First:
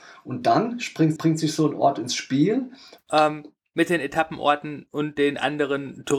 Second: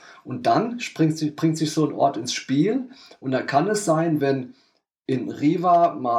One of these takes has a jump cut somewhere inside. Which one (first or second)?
first